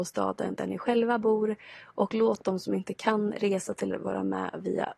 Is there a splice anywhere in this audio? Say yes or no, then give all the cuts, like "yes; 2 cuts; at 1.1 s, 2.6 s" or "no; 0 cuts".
yes; 1 cut; at 3.9 s